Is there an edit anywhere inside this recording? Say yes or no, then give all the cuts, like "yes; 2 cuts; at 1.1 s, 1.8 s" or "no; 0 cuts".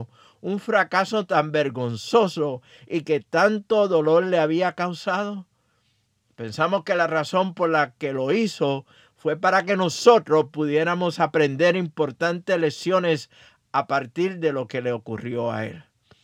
no; 0 cuts